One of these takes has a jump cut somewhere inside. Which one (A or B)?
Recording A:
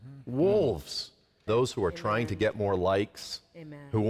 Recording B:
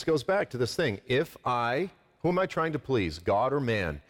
A